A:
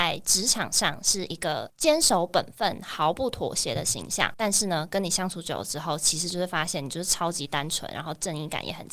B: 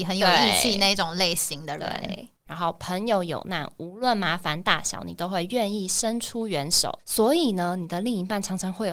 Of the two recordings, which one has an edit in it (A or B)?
B